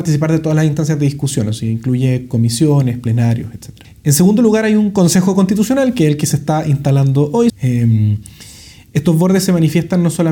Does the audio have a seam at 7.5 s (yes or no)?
yes